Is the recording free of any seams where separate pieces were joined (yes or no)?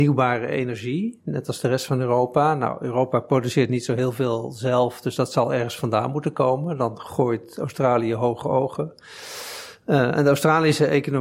yes